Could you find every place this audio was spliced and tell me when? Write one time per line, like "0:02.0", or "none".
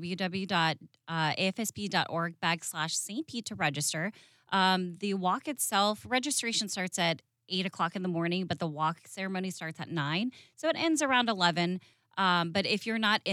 none